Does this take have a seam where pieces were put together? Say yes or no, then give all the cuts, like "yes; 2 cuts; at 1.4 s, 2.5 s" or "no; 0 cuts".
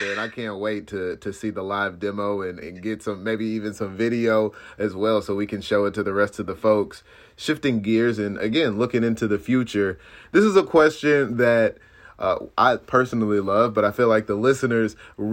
yes; 1 cut; at 2.6 s